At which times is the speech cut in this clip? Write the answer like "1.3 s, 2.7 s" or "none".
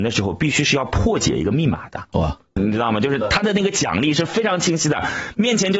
2.6 s